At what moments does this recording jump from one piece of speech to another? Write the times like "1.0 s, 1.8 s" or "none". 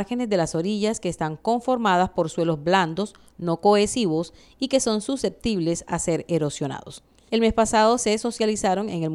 7.3 s